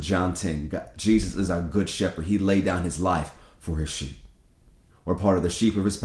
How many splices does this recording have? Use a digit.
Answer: 1